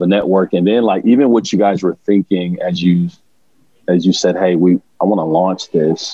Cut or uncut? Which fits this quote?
uncut